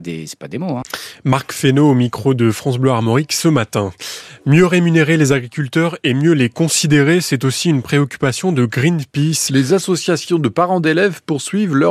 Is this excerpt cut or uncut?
cut